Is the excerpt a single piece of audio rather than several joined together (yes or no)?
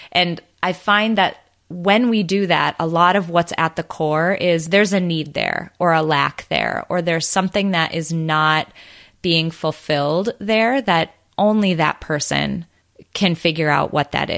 yes